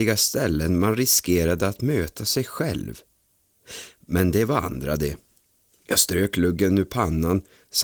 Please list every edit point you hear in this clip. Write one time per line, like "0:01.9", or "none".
none